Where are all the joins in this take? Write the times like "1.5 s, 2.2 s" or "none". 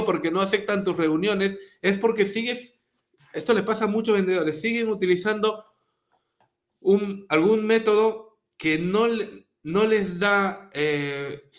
none